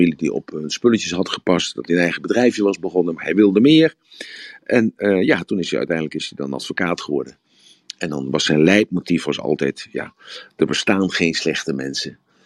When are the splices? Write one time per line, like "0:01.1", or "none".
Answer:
none